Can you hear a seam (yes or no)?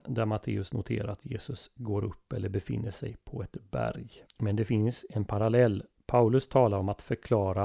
yes